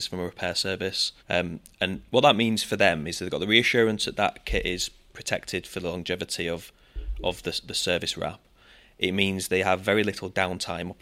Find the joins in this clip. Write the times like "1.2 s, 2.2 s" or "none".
1.2 s

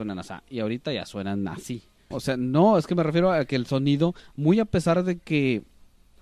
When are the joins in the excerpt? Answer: 2.1 s

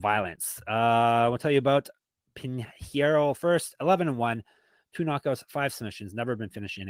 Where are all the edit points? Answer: none

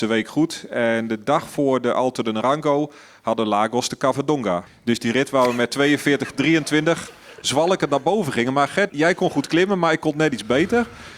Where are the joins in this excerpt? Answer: 4.7 s, 8.9 s

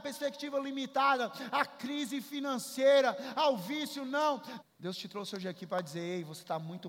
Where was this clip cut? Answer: 3.3 s, 4.6 s

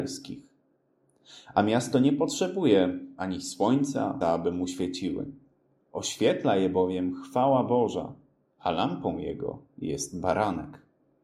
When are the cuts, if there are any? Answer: 4.2 s

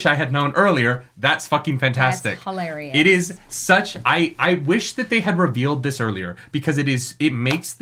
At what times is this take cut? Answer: none

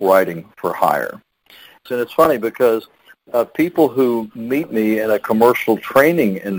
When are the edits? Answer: 1.9 s

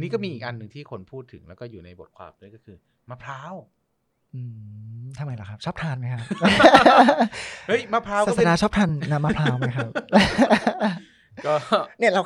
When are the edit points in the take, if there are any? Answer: none

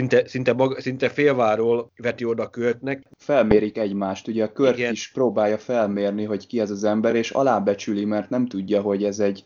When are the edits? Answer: none

